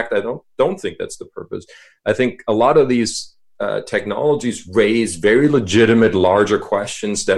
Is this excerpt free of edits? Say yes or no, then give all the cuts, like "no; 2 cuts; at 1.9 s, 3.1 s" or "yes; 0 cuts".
yes; 0 cuts